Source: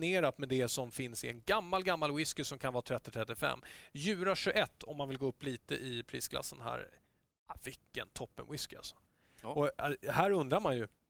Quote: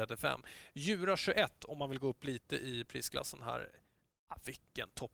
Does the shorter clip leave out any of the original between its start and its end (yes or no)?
no